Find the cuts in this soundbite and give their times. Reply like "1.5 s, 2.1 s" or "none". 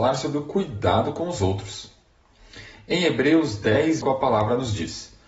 4.0 s